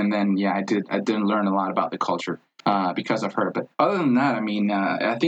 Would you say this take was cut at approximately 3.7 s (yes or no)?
yes